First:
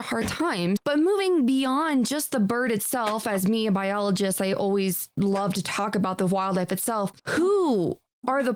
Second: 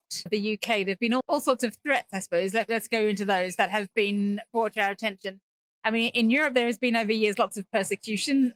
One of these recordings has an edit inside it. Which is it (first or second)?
first